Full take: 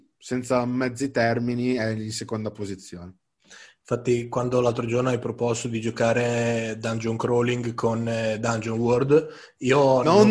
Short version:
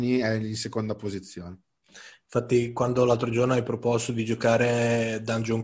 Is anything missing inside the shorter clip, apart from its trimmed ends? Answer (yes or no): no